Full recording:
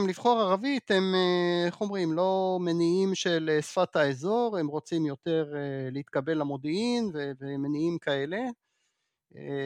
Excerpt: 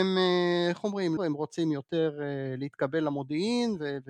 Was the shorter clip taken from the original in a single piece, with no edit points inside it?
no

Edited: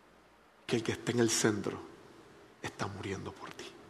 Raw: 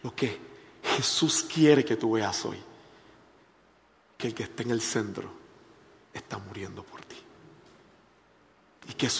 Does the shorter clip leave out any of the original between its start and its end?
no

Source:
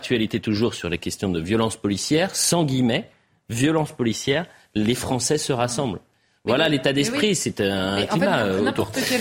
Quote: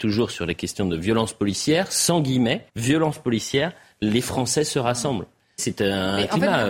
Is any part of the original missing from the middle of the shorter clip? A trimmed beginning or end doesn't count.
yes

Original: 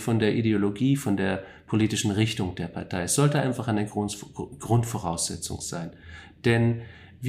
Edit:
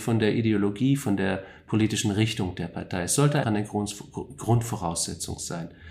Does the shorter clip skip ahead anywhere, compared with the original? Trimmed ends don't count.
yes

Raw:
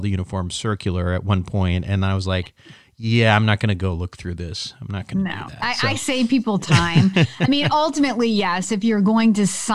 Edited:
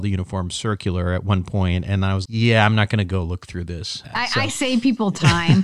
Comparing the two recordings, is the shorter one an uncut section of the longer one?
no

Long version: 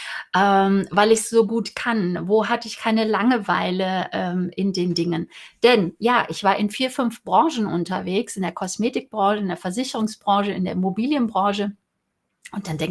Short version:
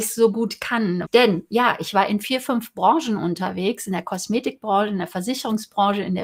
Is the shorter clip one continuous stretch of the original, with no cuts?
no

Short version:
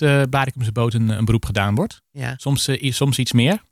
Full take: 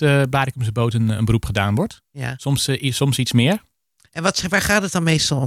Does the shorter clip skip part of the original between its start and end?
no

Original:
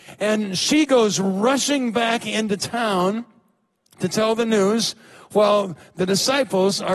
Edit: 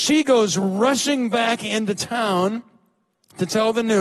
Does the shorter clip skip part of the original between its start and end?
no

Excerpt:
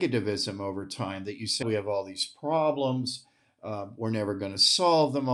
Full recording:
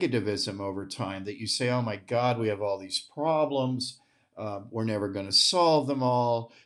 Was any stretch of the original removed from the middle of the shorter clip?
yes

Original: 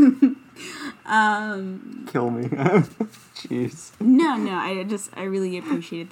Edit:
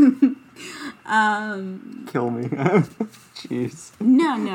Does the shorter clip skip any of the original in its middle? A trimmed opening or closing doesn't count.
no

